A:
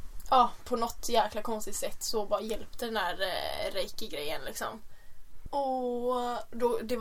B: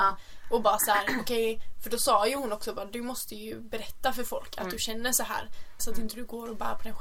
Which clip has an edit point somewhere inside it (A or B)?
B